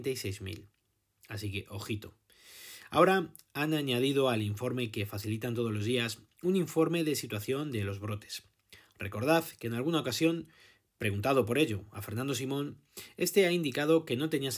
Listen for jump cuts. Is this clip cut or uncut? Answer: uncut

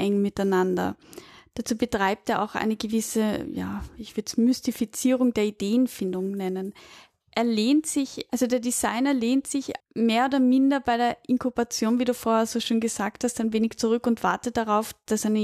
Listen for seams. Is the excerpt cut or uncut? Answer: cut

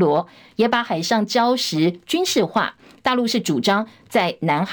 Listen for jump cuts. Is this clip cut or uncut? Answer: uncut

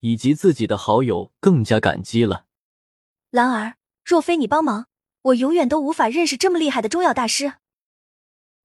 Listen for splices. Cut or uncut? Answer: cut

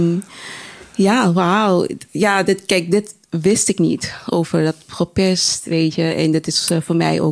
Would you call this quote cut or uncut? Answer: uncut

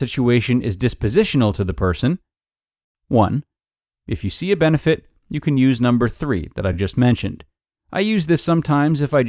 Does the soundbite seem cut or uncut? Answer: uncut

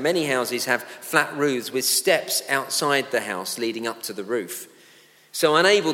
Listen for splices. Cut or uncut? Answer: uncut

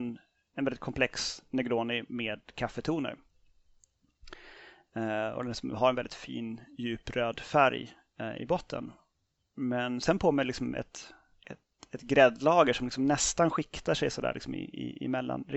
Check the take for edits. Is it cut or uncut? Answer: uncut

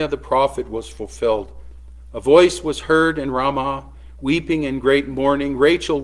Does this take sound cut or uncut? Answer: uncut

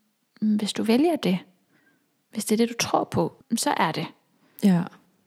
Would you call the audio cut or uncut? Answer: cut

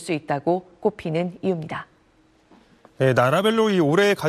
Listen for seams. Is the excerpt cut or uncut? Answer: uncut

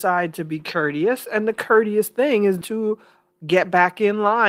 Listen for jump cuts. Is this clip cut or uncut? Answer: cut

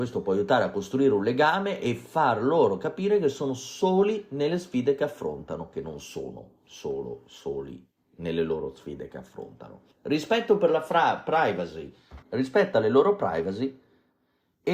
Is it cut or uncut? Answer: cut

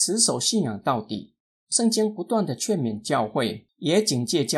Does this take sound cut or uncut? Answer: uncut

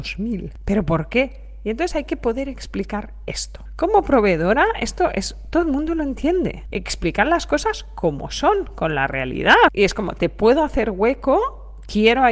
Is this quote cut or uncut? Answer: cut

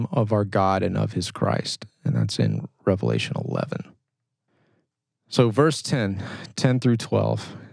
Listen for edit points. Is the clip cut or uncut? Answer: uncut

